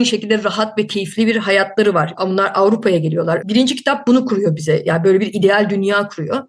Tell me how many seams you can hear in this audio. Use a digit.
2